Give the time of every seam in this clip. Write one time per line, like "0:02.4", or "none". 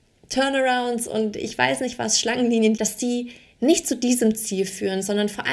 0:02.8